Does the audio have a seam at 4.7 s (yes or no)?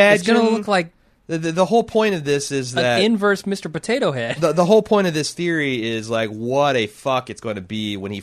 no